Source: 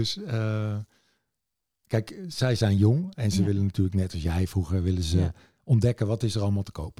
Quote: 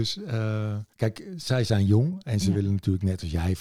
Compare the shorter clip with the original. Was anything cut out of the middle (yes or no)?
yes